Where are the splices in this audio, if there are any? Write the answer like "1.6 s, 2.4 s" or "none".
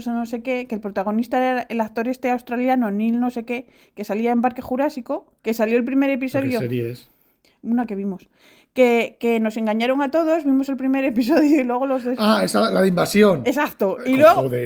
5.4 s

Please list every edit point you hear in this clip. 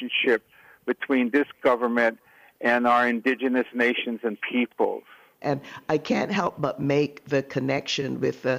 5.4 s

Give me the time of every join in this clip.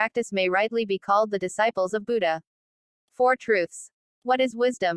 4.0 s

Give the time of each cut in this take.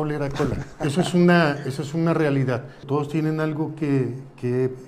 2.8 s

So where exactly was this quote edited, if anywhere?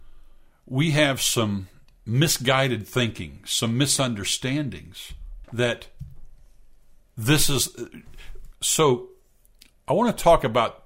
5.4 s, 8.5 s

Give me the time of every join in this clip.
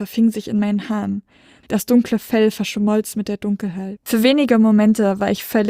1.6 s, 4.0 s

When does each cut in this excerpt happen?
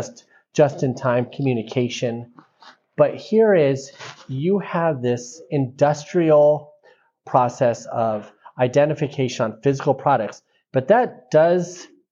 none

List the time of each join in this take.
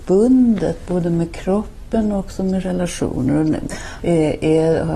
4.0 s

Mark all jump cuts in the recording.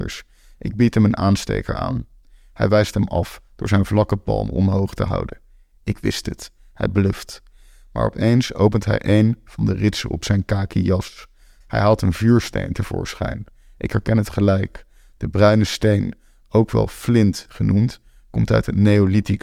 11.6 s

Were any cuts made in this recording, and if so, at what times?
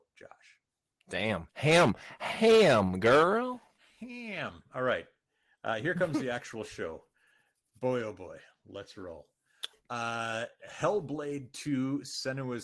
none

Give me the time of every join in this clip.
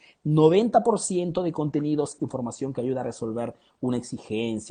2.2 s

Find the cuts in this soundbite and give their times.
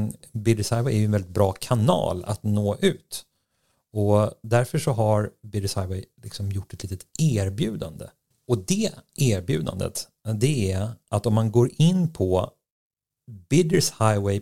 none

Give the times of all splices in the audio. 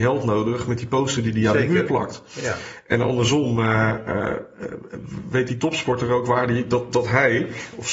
none

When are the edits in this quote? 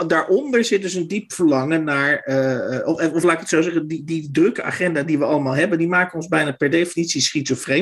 none

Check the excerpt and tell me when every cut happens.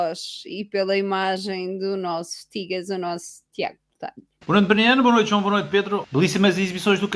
4.4 s, 6.0 s

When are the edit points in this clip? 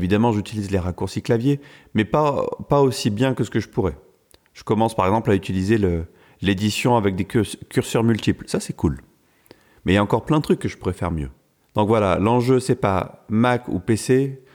none

